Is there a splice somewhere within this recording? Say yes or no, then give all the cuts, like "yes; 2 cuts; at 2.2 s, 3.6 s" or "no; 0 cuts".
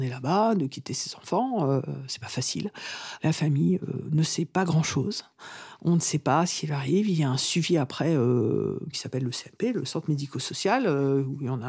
yes; 2 cuts; at 3.2 s, 8.9 s